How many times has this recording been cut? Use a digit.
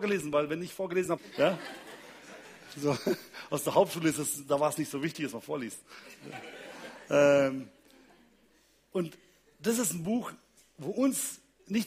1